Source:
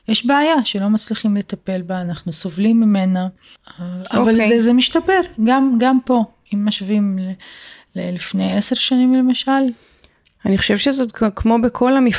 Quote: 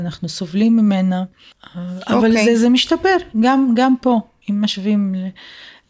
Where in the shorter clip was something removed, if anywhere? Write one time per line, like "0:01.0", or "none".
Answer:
none